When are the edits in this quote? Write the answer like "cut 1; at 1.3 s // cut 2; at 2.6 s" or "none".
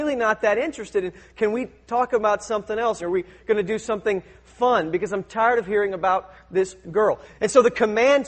cut 1; at 3.0 s // cut 2; at 7.3 s